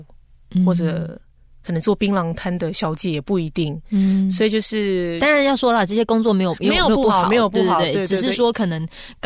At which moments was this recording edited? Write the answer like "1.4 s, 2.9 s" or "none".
none